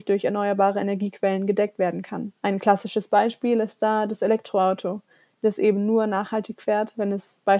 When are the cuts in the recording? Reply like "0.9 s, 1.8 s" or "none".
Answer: 2.4 s